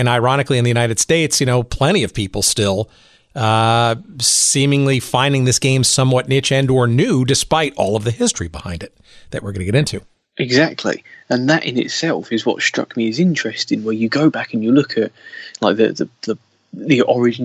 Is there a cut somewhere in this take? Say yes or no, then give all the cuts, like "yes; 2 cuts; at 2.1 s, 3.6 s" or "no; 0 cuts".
no; 0 cuts